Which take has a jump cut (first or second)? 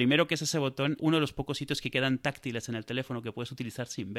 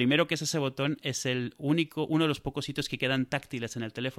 first